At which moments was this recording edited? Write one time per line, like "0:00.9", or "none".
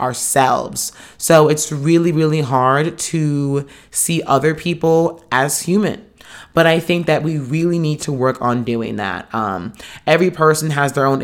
none